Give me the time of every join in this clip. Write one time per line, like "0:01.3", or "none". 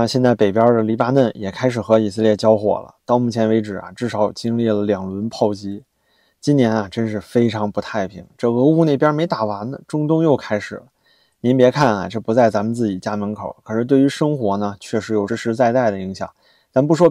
0:15.3